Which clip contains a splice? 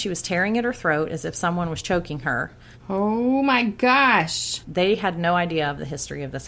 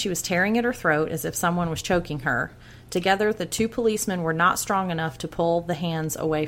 first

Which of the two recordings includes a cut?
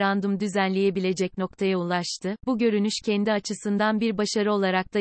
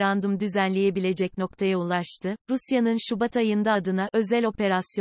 second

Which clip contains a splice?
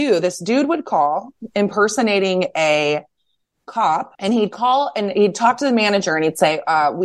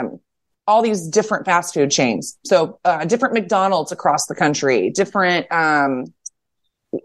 first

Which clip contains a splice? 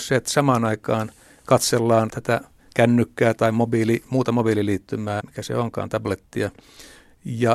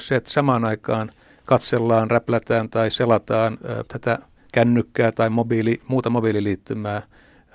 first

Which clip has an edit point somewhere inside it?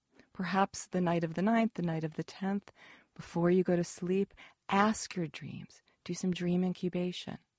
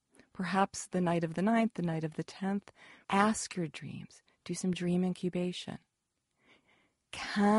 second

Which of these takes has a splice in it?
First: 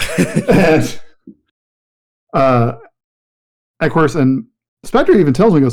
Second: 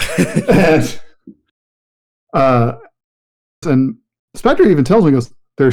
second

